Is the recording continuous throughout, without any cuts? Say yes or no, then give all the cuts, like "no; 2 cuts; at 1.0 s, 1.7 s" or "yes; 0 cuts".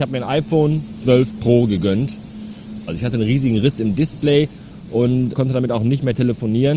no; 2 cuts; at 2.9 s, 5.3 s